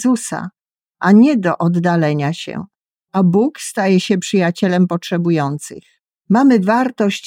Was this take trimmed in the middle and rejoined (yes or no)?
yes